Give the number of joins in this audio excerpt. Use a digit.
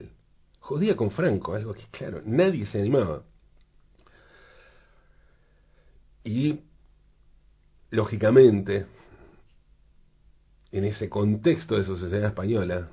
0